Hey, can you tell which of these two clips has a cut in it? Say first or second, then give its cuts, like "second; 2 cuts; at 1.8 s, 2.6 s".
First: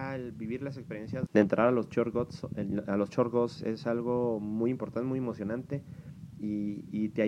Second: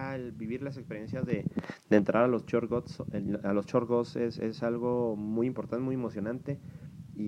first; 2 cuts; at 1.3 s, 3.6 s